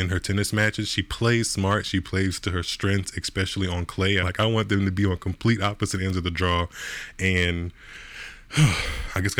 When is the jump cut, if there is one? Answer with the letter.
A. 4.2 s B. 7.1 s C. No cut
A